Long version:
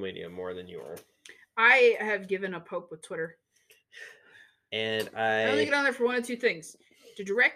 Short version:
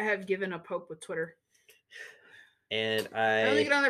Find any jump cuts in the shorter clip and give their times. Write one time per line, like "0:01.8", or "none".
none